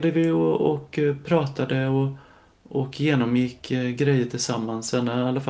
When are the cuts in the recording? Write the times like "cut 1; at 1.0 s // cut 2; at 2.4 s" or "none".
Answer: none